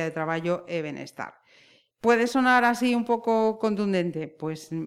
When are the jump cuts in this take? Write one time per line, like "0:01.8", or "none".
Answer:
none